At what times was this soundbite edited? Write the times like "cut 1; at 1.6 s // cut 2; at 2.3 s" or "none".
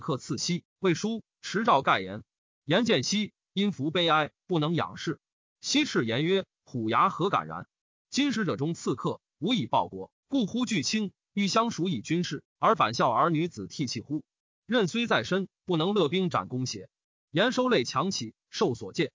none